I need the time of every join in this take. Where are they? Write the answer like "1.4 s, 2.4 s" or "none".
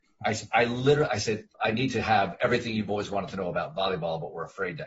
1.5 s